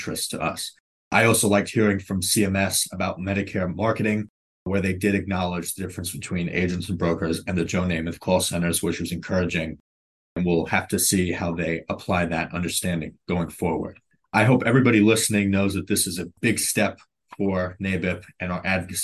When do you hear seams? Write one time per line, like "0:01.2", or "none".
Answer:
none